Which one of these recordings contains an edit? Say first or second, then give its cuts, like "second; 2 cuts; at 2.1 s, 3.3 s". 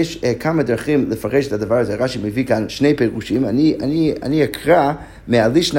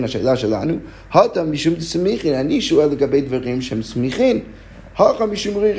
first; 1 cut; at 2.7 s